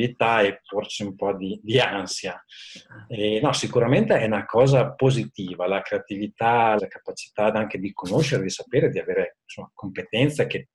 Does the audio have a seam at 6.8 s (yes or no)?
yes